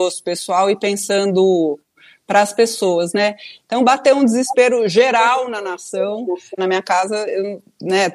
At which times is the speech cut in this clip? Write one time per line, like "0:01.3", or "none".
0:03.6
0:06.6